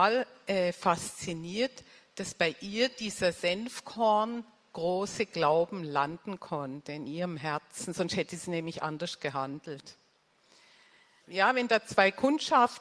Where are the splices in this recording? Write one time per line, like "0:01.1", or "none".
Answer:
0:11.2